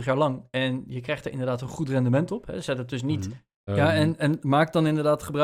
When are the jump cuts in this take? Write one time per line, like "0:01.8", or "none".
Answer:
0:03.7